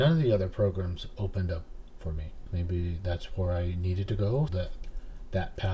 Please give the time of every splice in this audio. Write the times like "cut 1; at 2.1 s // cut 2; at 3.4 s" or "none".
cut 1; at 2.5 s // cut 2; at 4.5 s